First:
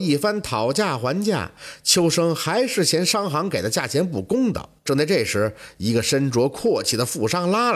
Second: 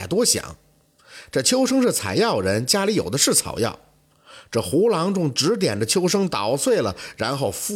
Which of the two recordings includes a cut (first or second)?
first